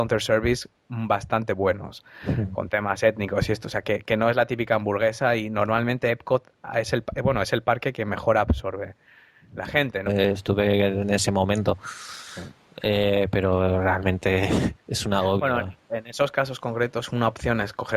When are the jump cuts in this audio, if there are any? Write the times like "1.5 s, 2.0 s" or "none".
10.1 s